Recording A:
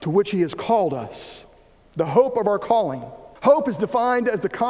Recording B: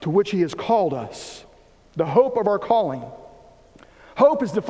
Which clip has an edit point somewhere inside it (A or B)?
A